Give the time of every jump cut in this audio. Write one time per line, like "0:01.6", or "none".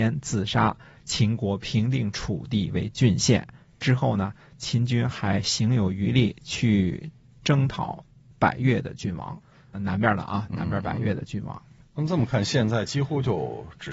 none